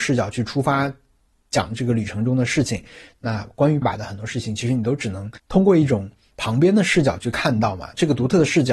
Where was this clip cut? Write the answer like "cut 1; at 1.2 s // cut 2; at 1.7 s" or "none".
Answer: cut 1; at 3.8 s // cut 2; at 5.4 s